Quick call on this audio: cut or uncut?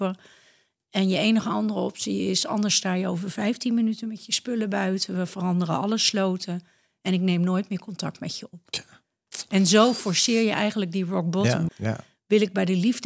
cut